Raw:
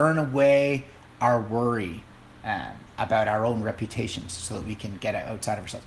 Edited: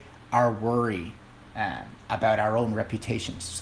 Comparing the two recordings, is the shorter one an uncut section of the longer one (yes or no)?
yes